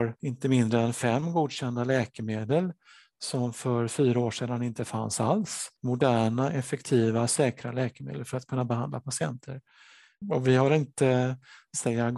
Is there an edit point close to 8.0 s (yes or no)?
no